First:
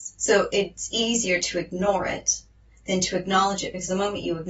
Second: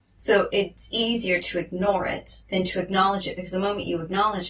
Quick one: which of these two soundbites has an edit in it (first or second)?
second